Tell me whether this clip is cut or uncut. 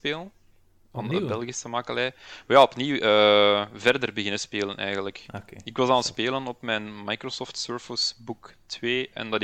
uncut